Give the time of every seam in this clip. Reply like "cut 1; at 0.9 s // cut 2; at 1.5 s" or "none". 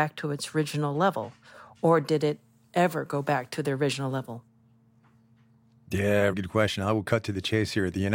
cut 1; at 6.3 s